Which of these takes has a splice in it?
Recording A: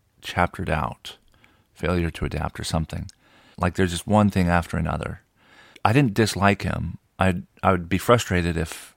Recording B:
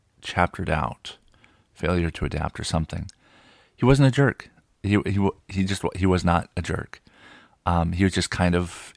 A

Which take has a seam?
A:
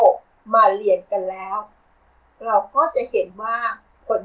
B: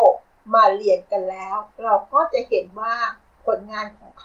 B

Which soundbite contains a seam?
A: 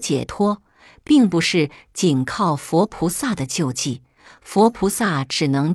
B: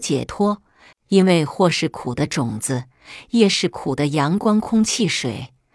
B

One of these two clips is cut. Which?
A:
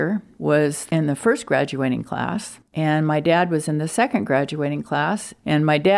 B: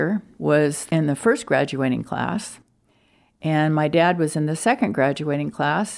A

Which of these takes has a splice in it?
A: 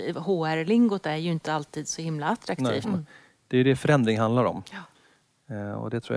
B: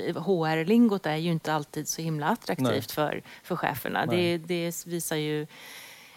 A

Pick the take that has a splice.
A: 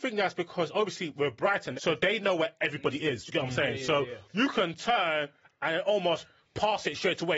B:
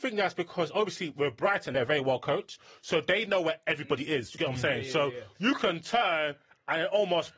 A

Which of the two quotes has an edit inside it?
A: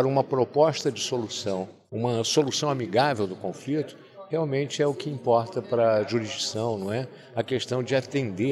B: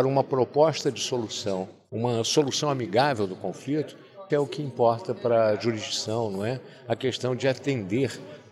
B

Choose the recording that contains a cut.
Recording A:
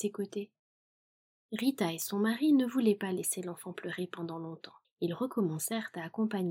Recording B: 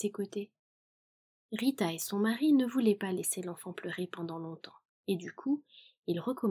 A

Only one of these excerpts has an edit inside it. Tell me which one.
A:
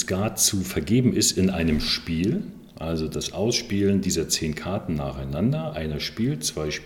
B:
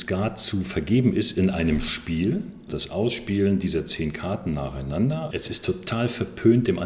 B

